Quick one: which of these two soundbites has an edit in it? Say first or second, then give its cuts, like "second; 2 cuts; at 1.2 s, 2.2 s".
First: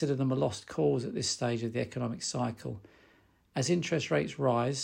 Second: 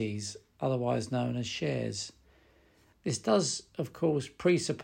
second; 1 cut; at 2.9 s